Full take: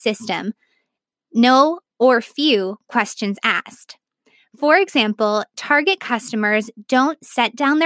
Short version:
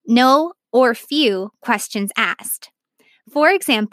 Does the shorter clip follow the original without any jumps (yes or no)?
yes